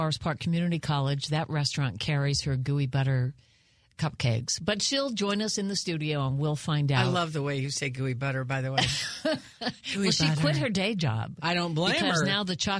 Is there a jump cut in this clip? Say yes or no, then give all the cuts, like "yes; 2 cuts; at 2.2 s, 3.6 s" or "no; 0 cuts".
no; 0 cuts